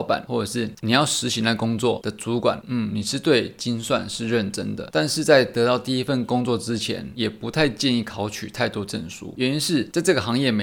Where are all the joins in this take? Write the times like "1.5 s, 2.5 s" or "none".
2.6 s